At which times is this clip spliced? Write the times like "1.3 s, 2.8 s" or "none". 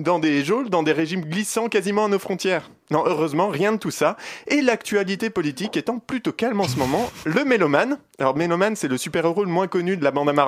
none